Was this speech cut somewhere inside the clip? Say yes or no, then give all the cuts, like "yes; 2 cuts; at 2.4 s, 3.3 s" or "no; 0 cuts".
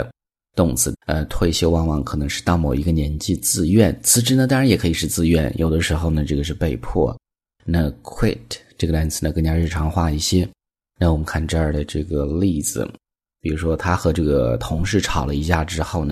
yes; 1 cut; at 0.9 s